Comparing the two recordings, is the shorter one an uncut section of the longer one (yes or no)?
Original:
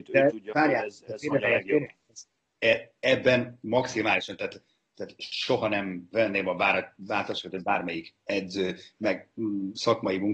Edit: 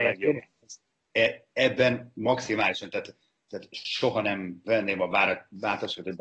yes